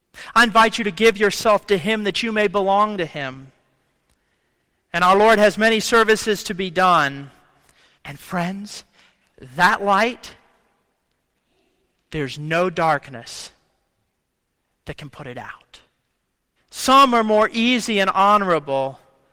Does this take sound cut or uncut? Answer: cut